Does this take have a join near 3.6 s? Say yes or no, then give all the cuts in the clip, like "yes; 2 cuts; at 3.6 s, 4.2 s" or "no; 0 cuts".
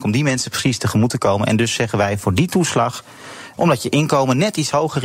yes; 1 cut; at 3.6 s